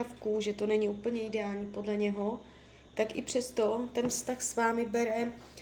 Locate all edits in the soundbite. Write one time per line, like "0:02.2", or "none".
0:02.9